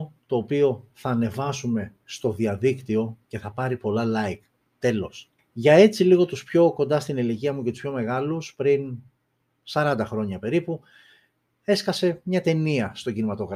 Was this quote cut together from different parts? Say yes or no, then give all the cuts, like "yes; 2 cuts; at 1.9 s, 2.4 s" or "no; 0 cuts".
yes; 1 cut; at 5.4 s